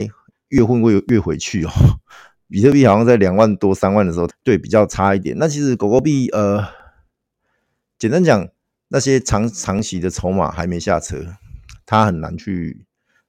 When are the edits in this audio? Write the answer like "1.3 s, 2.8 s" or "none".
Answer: 4.3 s